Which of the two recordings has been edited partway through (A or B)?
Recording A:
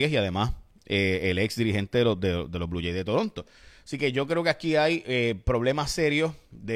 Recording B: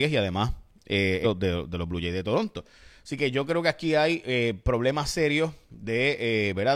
B